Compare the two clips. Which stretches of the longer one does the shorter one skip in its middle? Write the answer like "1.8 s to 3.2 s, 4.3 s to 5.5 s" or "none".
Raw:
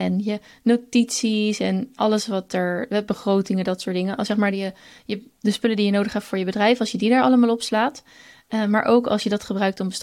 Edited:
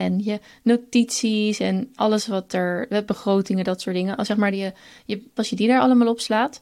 5.4 s to 6.8 s